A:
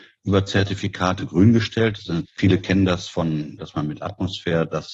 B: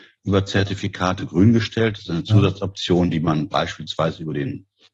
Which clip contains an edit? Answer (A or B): A